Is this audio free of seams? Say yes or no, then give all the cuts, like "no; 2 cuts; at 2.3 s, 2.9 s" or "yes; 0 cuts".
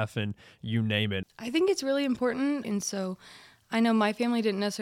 no; 2 cuts; at 1.2 s, 2.6 s